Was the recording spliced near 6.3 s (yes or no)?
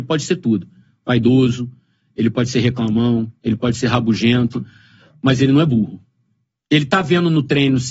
no